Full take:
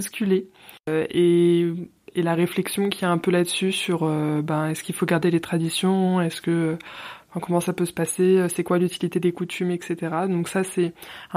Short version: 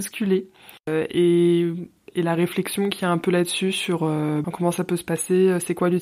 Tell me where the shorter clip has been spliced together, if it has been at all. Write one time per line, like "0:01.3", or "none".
0:04.4